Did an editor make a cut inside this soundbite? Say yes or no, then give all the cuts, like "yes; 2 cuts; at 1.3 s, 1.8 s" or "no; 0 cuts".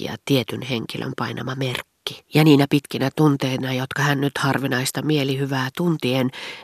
yes; 1 cut; at 2.2 s